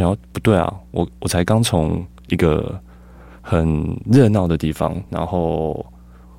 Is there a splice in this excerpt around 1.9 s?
no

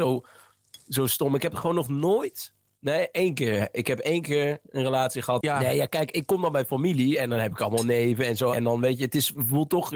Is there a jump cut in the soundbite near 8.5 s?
yes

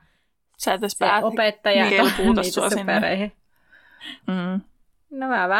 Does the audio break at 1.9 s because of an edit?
yes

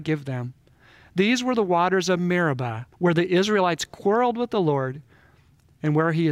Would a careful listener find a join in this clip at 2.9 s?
yes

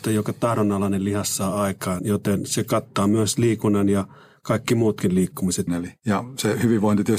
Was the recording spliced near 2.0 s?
yes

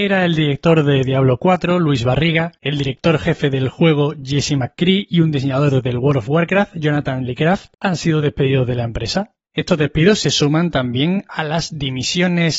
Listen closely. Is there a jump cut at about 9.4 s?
no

